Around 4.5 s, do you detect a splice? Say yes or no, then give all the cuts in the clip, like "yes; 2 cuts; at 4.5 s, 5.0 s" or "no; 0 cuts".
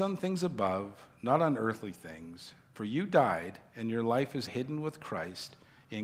yes; 1 cut; at 4.5 s